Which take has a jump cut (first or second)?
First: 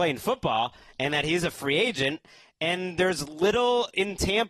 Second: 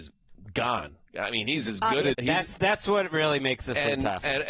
second